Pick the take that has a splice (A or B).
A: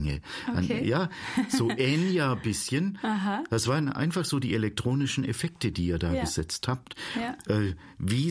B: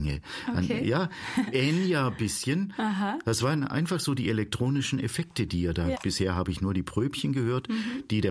B